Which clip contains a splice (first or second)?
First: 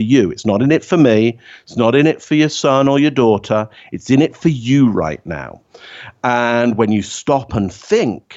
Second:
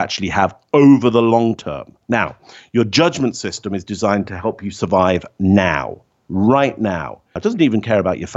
second